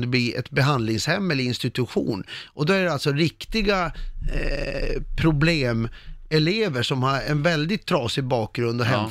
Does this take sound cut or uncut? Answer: uncut